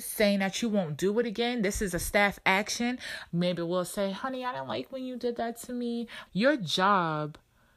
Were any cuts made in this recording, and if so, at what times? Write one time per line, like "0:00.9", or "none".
0:03.3
0:06.3